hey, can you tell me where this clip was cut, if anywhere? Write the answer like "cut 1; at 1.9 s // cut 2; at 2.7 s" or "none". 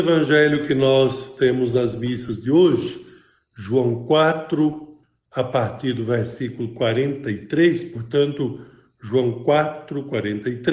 none